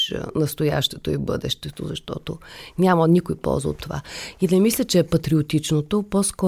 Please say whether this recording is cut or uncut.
uncut